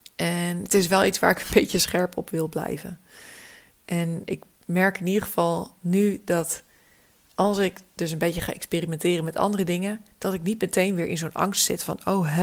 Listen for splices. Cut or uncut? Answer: uncut